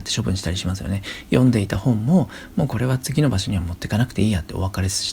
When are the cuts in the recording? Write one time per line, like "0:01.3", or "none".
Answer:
none